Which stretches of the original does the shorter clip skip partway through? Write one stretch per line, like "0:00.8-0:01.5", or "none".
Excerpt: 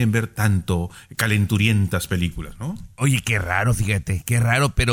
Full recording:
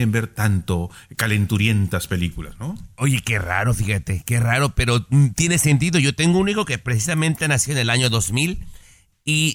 none